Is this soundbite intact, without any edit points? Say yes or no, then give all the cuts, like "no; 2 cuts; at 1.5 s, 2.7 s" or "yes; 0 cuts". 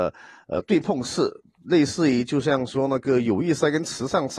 yes; 0 cuts